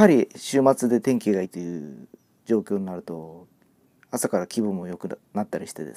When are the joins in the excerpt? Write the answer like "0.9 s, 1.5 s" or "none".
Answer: 1.4 s